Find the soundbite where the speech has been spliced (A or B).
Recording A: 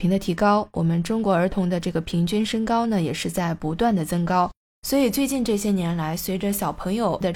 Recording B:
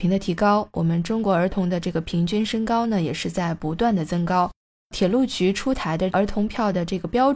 A